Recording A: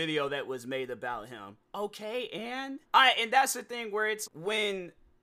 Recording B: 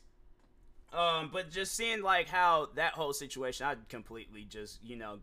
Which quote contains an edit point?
A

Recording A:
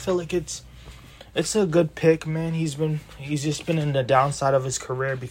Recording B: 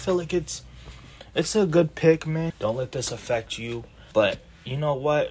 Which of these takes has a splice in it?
B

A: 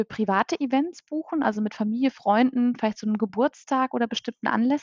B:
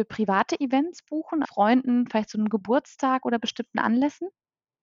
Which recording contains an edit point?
B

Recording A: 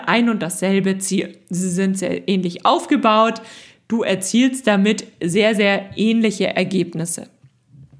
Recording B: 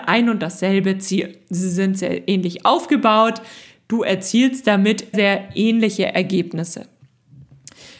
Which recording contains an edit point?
B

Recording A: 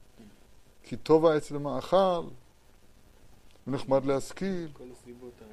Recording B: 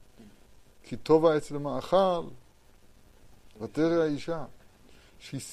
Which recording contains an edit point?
B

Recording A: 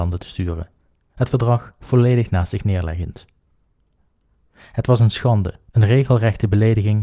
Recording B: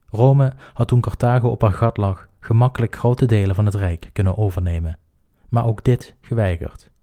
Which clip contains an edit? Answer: A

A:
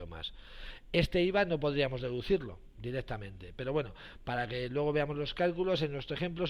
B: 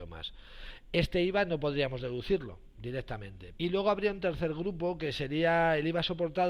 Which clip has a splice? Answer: B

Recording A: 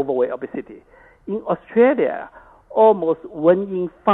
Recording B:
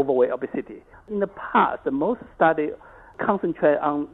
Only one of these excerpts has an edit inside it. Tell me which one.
B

